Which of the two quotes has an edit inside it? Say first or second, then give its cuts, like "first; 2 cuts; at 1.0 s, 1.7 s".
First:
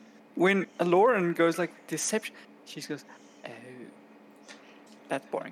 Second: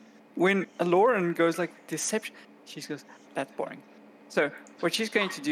second; 1 cut; at 3.2 s